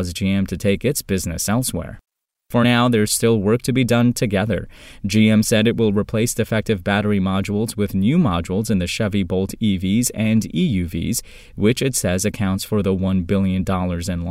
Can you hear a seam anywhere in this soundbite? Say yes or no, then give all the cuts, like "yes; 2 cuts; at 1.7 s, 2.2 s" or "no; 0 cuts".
no; 0 cuts